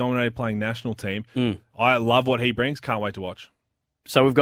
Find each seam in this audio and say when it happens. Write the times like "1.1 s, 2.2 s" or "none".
1.7 s